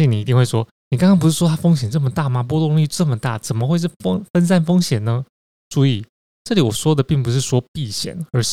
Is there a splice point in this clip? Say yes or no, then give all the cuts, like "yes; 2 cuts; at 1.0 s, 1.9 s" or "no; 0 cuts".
no; 0 cuts